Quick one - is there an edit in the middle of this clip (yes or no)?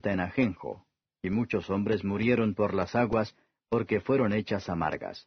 no